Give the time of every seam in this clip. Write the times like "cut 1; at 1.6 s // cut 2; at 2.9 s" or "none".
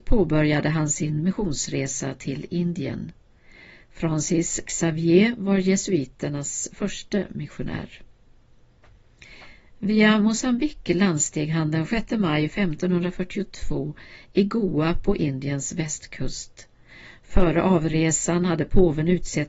none